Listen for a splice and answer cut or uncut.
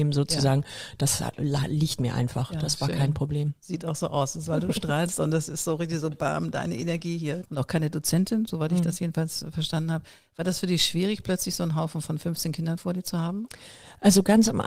cut